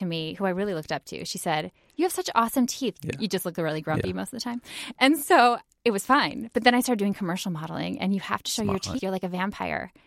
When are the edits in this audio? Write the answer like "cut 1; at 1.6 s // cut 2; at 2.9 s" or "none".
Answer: cut 1; at 2.9 s // cut 2; at 9.0 s